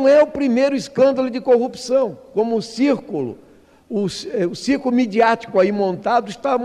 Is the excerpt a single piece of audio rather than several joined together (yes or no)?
yes